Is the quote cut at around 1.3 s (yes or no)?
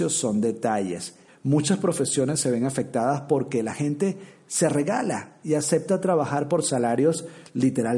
yes